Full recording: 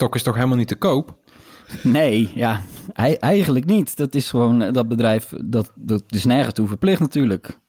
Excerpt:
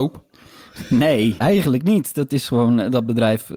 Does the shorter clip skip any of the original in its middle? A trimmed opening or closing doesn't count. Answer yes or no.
yes